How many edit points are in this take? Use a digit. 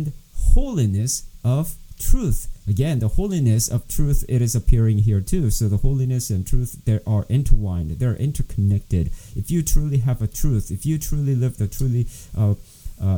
0